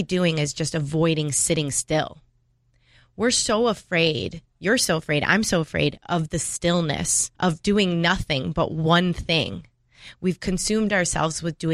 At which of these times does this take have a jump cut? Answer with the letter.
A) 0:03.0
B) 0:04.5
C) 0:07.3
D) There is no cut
C